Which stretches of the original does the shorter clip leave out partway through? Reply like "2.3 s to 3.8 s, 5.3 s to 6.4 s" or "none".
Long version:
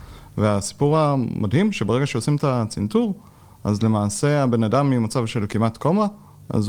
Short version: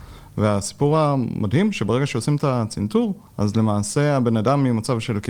3.3 s to 3.5 s